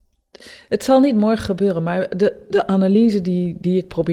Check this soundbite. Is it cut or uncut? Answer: uncut